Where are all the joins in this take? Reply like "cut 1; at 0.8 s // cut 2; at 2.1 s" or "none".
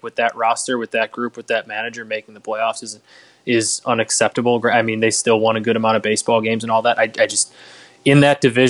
none